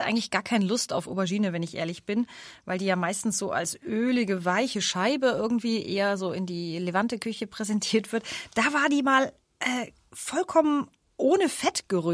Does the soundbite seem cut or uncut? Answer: uncut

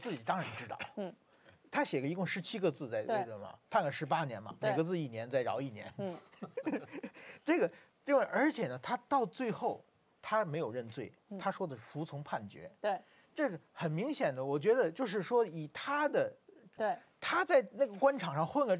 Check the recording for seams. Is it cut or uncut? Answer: cut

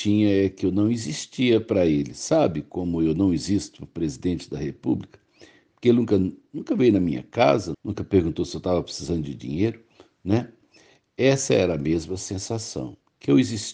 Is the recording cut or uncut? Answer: cut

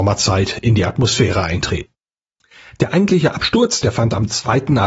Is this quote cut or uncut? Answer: cut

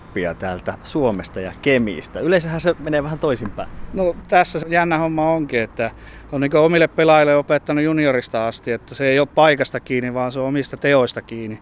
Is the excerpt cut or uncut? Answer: cut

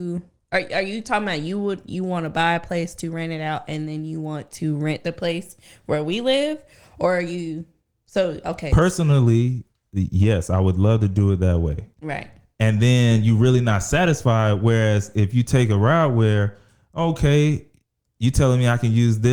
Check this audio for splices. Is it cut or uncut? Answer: cut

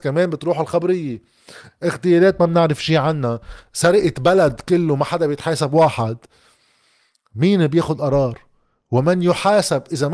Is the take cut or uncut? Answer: uncut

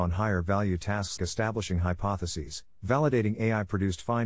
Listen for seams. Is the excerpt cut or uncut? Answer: cut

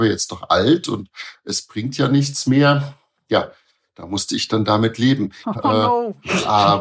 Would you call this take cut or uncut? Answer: cut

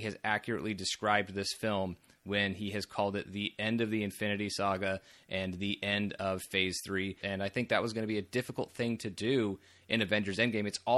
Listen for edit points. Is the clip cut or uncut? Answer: cut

